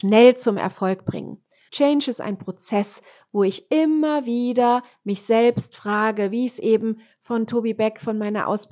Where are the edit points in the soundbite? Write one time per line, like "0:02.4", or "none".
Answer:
0:01.7